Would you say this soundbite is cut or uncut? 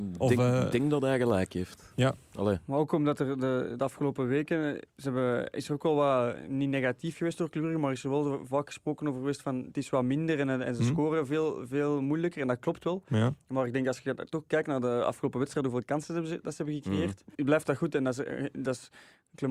cut